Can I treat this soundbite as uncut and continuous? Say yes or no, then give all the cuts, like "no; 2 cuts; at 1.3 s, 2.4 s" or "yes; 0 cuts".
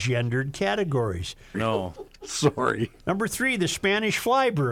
no; 2 cuts; at 1.5 s, 3.0 s